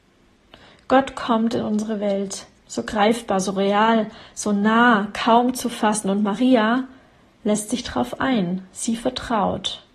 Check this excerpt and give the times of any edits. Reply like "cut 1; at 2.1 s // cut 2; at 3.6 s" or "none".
none